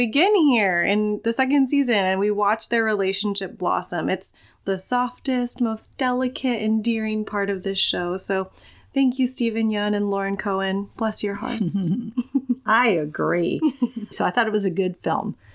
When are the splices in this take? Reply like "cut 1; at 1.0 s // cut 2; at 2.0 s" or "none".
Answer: cut 1; at 14.1 s